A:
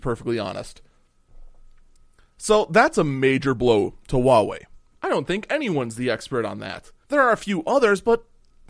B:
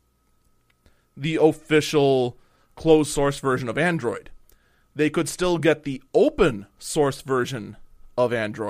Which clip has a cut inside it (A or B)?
A